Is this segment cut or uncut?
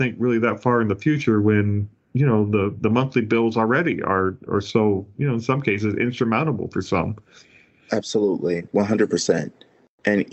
cut